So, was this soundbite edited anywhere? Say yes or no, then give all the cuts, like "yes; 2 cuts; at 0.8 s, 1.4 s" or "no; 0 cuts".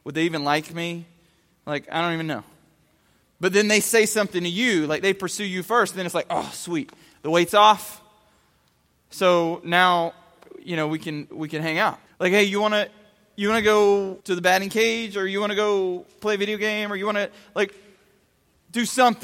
yes; 2 cuts; at 12.1 s, 14.2 s